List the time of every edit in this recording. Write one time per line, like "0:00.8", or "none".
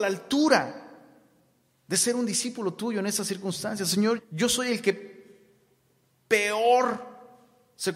0:04.2